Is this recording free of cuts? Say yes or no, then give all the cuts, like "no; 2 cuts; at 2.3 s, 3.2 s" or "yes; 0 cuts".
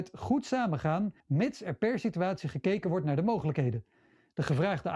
no; 1 cut; at 1.2 s